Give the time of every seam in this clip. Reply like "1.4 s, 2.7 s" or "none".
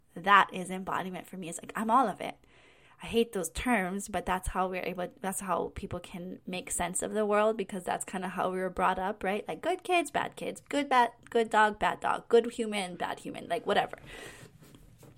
2.8 s

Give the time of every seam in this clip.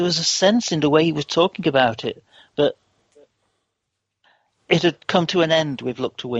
none

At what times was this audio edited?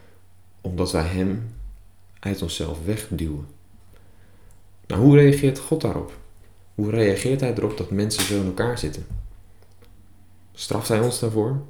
2.1 s

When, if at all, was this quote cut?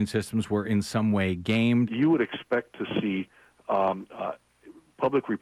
1.9 s

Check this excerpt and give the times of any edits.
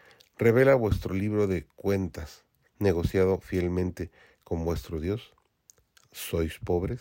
2.7 s

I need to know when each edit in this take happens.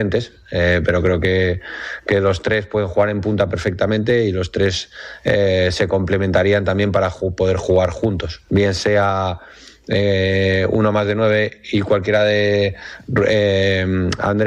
8.5 s

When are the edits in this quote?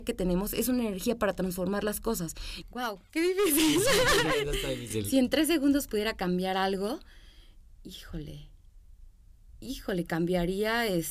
2.6 s

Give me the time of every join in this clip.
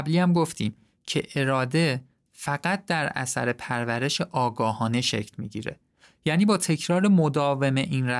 none

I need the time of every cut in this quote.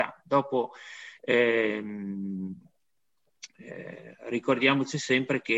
none

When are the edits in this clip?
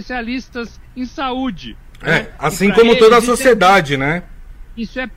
none

